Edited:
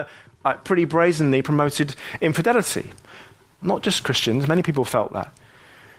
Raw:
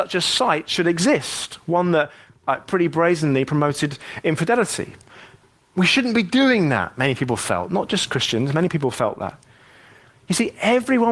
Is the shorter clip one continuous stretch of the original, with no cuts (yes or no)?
no